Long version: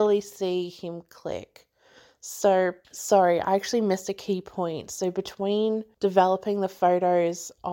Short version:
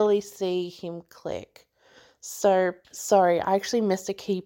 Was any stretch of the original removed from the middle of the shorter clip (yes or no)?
no